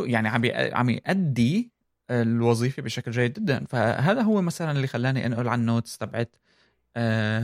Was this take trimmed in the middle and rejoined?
no; 0 cuts

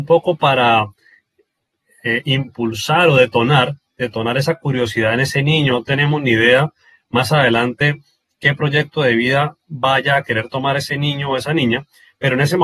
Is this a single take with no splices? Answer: no; 1 cut; at 5.7 s

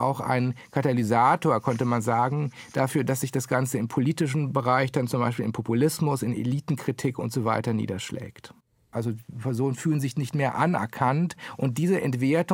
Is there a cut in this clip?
yes; 1 cut; at 8.9 s

